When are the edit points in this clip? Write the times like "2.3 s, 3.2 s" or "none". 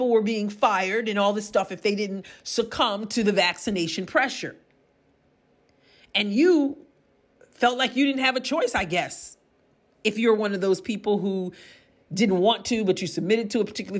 none